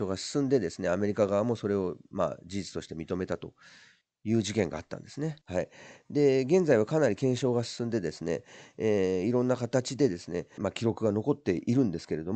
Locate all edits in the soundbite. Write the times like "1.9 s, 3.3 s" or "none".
5.4 s, 10.6 s